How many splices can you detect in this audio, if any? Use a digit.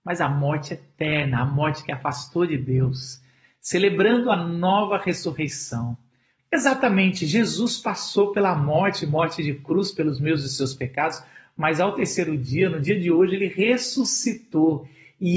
1